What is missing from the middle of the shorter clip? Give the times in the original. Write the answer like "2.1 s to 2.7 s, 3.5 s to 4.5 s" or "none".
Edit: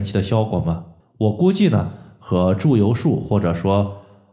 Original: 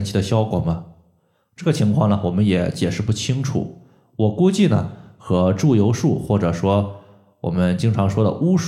1.0 s to 4.0 s

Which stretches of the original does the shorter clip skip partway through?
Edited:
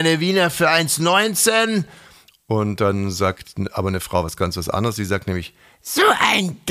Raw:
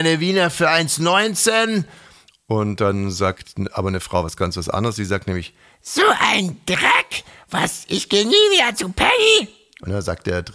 none

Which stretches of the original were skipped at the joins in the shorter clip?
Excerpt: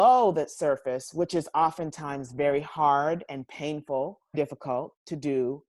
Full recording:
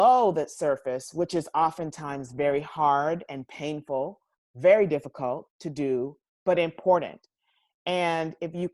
4.3 s to 4.9 s

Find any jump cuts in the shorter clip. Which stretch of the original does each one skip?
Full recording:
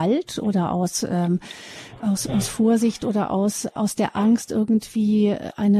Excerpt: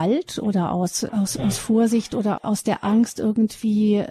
1.1 s to 2.0 s, 3.3 s to 3.7 s

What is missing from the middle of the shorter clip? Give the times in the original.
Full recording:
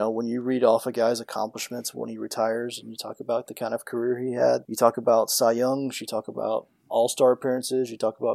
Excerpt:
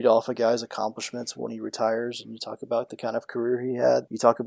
none

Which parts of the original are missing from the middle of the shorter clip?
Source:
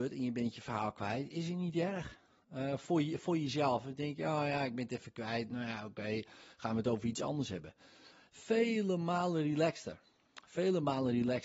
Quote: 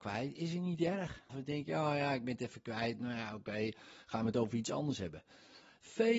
2.2 s to 3.8 s

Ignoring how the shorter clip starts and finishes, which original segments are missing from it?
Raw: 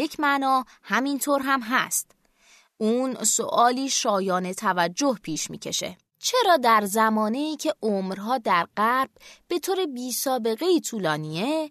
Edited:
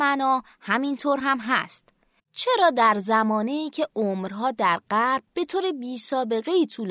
2.4 s to 6.1 s, 9.1 s to 9.4 s

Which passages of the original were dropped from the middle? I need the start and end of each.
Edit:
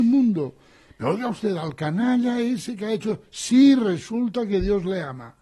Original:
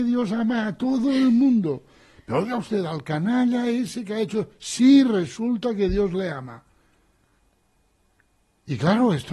none

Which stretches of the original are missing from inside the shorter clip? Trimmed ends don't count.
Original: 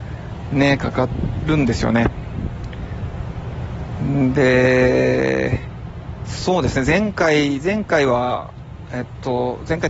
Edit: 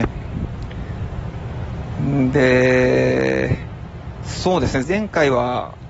6.9 s to 7.6 s

